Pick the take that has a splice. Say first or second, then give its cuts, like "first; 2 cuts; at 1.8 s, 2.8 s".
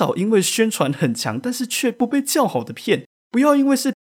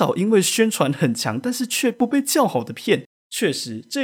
second; 1 cut; at 3.1 s